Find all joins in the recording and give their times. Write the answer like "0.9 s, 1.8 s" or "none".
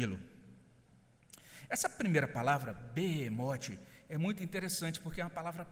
none